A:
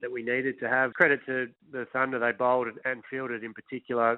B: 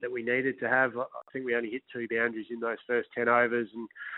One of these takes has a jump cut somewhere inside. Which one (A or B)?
A